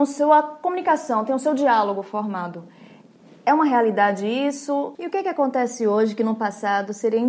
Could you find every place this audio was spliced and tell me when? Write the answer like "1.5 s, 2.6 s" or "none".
5.0 s